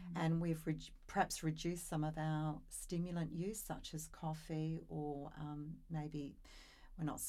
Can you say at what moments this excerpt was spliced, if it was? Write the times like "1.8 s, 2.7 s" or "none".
none